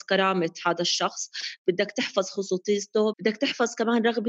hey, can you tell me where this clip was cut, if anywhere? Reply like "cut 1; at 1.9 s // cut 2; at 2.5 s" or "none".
cut 1; at 3.1 s